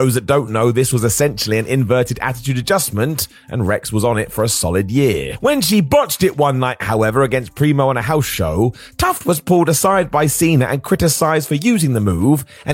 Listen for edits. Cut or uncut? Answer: uncut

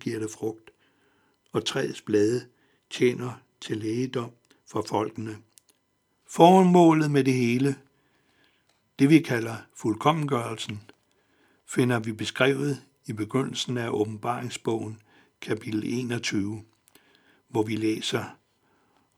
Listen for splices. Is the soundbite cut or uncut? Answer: cut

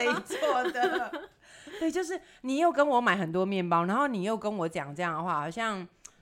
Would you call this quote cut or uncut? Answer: uncut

